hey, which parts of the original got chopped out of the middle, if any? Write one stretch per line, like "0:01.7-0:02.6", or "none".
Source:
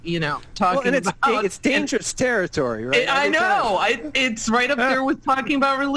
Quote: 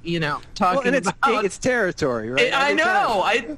0:01.6-0:02.1

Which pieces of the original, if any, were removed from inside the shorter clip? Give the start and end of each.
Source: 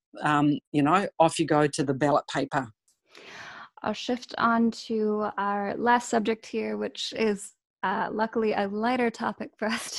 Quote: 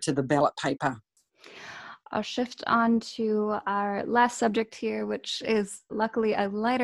0:07.6-0:08.1

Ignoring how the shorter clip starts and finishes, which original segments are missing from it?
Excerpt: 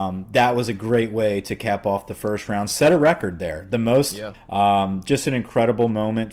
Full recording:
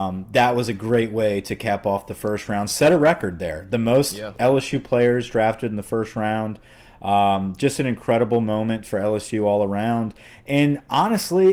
0:04.3-0:06.9

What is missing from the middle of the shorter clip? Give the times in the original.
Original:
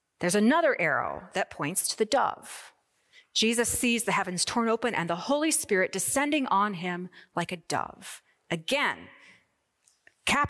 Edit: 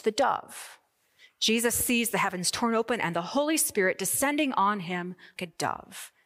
0:07.3-0:07.5

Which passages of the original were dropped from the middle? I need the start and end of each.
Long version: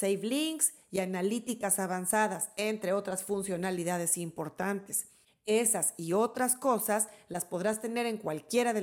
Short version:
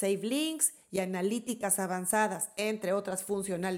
none

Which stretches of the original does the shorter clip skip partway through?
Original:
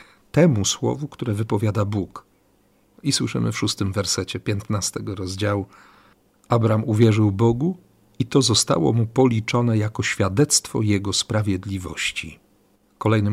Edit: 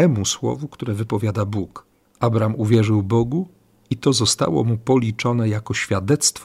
0:02.4-0:06.3

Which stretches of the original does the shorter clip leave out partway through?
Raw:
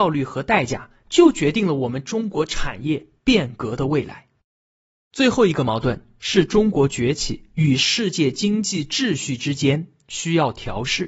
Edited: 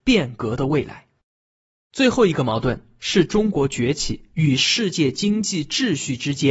none

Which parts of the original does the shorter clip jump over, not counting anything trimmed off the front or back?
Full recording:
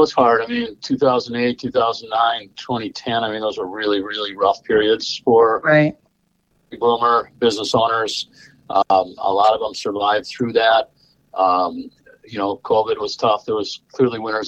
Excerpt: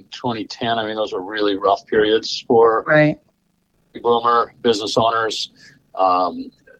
0:04.0-0:04.4
0:08.5-0:11.2

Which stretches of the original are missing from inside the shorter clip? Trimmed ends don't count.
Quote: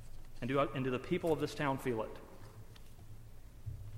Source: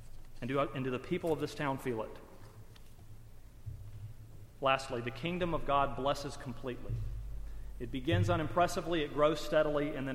none

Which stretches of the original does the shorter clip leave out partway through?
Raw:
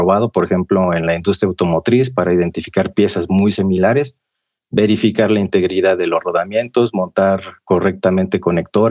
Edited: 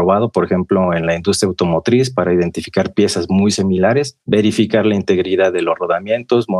0:04.2-0:04.7

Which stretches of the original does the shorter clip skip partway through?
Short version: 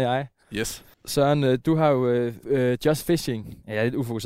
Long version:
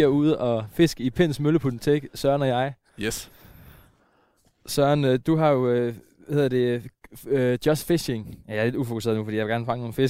0:03.4-0:04.5
0:06.0-0:07.2

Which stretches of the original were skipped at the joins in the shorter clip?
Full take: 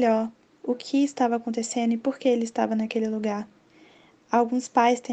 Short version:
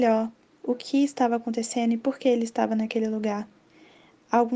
none

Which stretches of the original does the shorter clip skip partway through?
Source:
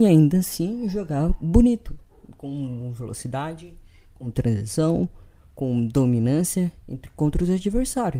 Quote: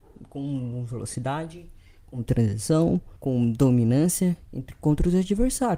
0:05.2-0:05.5

